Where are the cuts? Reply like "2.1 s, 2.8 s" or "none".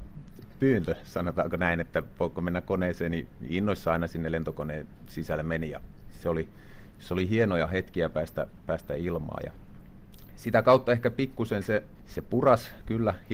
none